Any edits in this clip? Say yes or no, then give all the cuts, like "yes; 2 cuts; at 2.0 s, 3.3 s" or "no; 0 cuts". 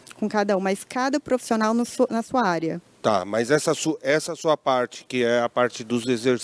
no; 0 cuts